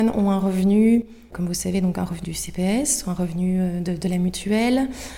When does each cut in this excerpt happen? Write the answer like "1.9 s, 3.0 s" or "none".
2.2 s